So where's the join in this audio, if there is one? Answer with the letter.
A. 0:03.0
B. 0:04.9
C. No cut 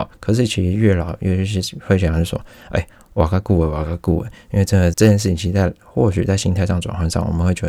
B